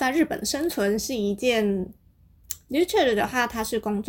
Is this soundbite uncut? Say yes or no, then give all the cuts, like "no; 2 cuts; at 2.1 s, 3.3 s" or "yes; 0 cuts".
no; 1 cut; at 2.7 s